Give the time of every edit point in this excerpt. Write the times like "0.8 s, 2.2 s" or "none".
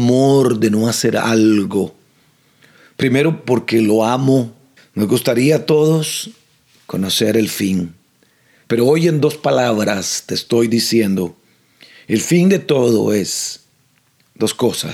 4.8 s